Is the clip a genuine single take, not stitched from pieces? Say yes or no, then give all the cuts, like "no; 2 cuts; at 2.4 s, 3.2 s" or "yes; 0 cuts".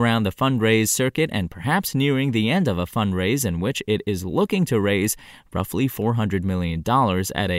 yes; 0 cuts